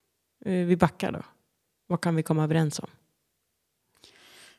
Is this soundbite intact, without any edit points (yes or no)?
yes